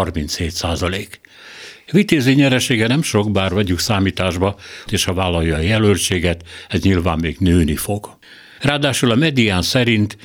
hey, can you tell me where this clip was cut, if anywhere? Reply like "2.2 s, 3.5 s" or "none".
4.9 s, 8.6 s